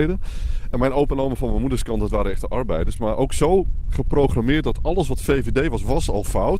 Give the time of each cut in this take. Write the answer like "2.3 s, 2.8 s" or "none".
none